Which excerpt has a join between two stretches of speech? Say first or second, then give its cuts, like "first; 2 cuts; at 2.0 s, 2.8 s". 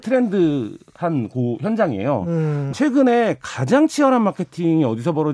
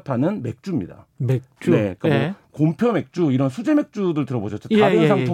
first; 1 cut; at 2.7 s